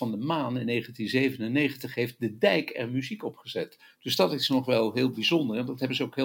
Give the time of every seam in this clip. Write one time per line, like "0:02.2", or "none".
none